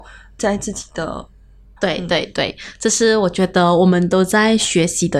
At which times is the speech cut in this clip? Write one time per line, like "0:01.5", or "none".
0:01.8